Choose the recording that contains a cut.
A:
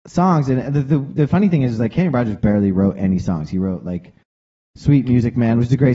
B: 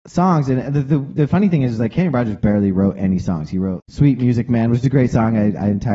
B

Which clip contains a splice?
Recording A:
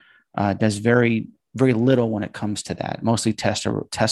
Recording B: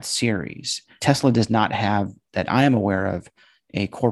B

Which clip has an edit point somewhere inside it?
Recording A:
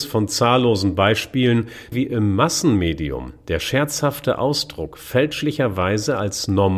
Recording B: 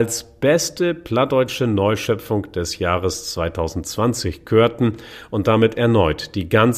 A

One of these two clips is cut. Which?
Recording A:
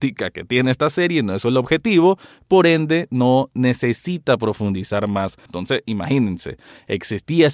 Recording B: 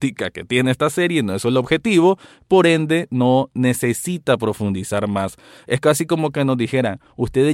A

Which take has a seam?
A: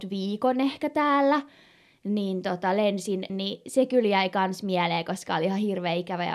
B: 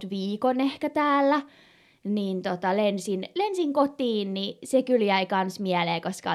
A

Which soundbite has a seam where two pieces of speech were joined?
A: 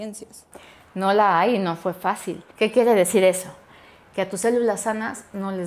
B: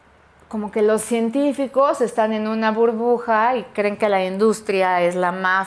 A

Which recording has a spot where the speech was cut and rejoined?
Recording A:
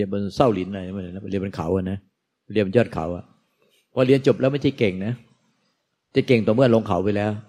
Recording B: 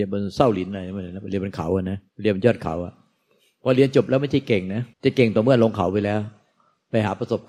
B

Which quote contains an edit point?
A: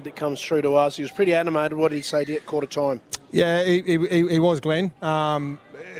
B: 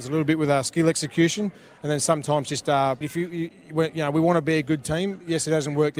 B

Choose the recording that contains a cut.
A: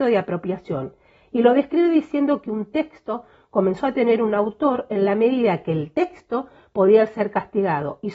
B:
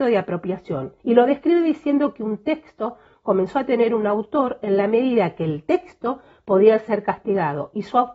B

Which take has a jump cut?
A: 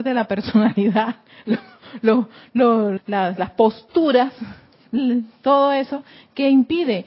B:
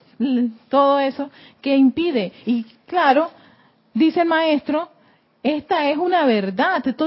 A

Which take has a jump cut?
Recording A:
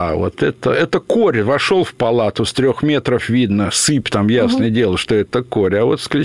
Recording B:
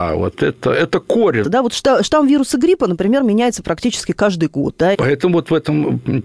B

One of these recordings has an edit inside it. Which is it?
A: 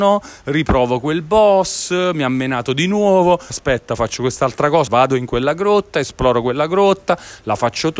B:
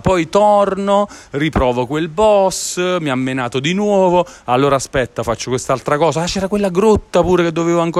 A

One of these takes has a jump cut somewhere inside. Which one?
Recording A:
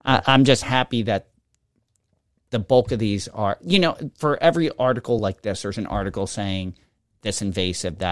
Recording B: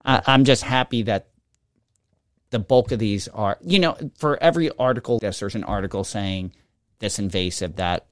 B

